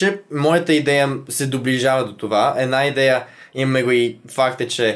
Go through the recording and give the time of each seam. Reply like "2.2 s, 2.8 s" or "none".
none